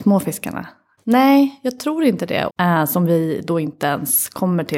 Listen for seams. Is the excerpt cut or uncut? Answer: cut